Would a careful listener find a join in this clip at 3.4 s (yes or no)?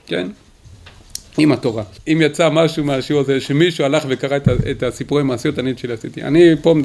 no